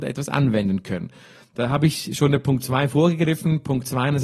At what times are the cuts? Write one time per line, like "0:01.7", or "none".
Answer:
none